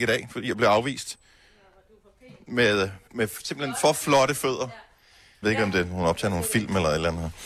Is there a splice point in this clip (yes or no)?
yes